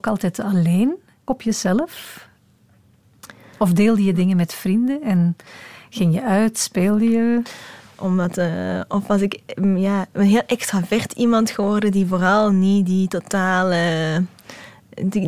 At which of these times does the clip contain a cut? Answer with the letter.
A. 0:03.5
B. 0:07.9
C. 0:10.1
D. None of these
B